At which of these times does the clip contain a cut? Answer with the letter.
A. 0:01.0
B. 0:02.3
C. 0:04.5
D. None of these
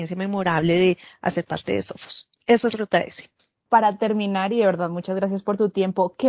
B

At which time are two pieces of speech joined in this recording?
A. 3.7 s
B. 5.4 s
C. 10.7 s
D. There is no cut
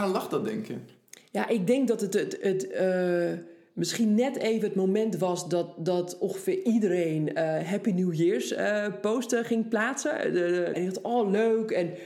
C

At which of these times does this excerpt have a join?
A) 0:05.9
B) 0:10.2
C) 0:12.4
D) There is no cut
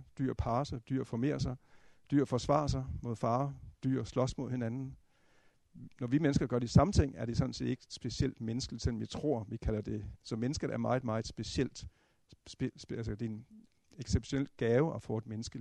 B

